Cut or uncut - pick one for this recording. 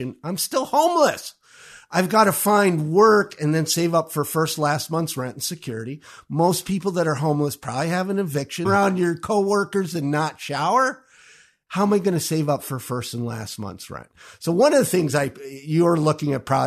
cut